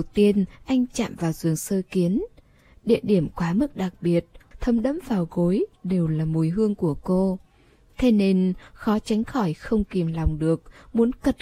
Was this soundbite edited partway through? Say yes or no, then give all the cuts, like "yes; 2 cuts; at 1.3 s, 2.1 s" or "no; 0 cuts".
yes; 1 cut; at 4.5 s